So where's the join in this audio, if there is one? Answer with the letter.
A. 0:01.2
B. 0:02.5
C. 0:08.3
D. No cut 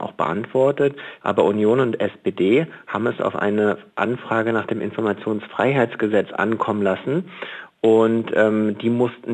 A